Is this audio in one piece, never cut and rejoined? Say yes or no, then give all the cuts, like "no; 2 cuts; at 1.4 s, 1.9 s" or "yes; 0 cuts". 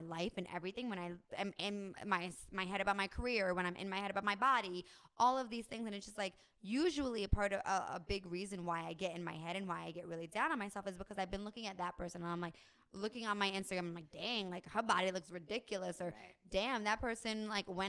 yes; 0 cuts